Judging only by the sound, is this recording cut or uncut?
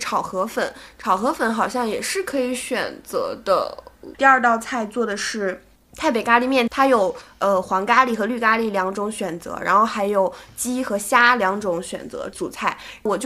cut